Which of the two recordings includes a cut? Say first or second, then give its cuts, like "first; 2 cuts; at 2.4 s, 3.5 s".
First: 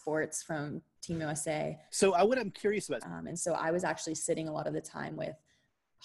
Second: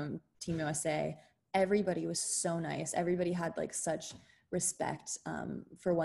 first; 2 cuts; at 1.9 s, 3.0 s